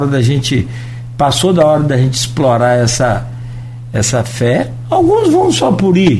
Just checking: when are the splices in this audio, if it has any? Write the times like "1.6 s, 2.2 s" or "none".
none